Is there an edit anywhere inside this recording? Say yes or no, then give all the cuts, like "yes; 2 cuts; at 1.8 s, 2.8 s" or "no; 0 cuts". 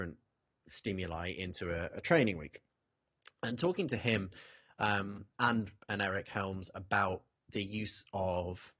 no; 0 cuts